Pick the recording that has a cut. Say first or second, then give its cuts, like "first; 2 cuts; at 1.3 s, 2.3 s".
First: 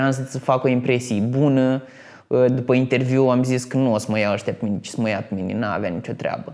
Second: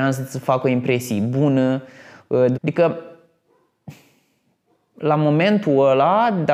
second; 1 cut; at 2.5 s